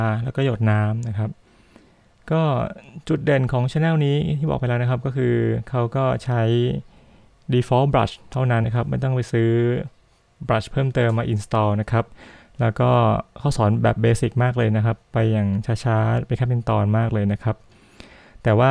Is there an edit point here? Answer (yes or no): yes